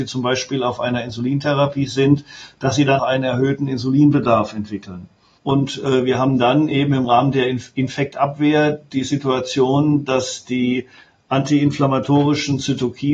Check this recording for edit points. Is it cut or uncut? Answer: cut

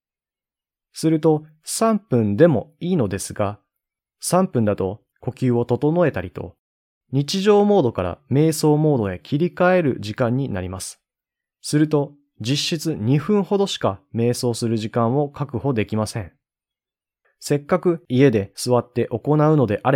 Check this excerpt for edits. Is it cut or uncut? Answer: cut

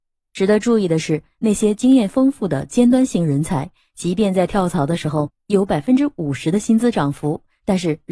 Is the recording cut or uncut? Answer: uncut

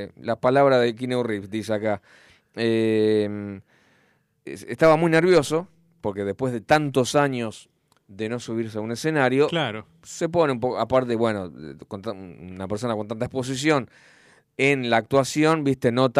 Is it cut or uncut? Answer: uncut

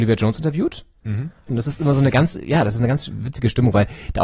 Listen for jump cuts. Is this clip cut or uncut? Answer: cut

